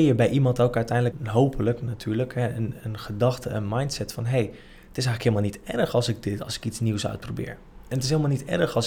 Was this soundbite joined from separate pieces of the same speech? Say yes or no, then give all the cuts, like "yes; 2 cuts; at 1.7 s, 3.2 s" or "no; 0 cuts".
yes; 2 cuts; at 1.1 s, 2.8 s